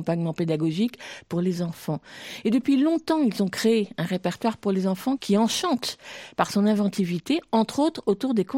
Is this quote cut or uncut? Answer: cut